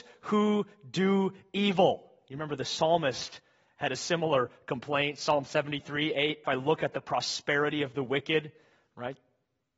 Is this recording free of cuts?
no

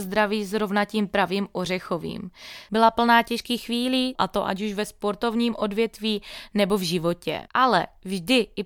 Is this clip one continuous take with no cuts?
no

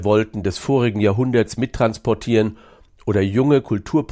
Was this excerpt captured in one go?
yes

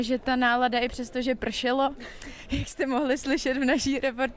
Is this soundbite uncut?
yes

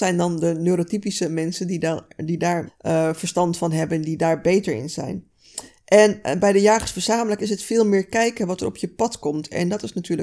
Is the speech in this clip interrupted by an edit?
yes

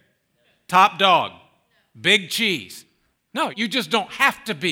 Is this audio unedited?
no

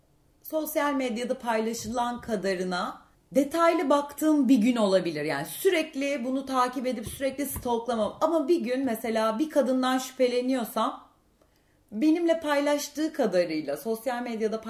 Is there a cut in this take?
no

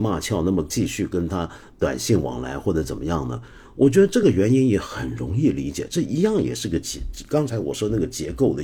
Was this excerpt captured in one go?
yes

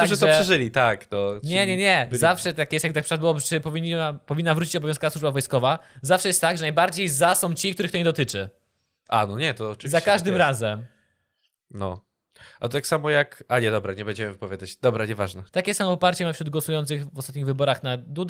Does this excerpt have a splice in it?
yes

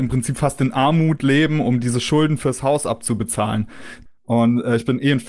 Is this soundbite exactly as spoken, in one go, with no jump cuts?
no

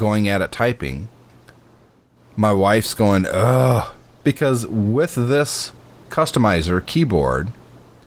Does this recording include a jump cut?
yes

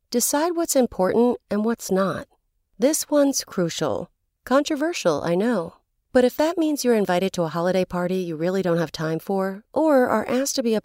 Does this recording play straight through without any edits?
no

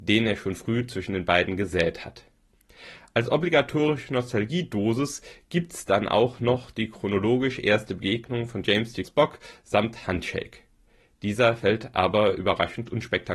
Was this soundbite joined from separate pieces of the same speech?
yes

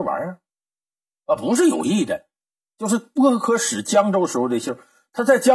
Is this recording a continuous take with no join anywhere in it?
yes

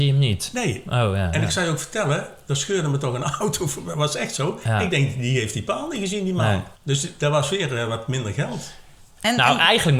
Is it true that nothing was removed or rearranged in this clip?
no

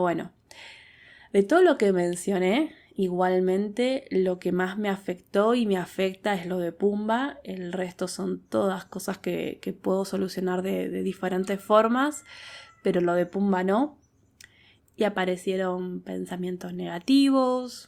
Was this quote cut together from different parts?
yes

